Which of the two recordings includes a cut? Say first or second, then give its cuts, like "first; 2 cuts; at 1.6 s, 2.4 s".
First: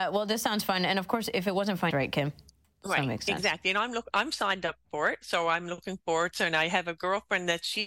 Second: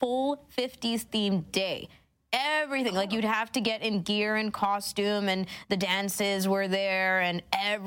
first; 1 cut; at 1.9 s